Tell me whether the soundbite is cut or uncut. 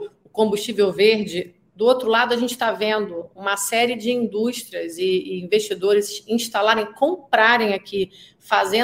uncut